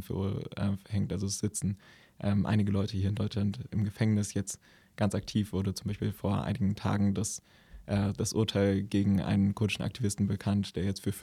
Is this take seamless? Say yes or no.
yes